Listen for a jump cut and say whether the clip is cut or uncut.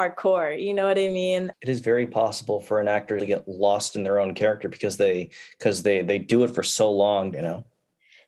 cut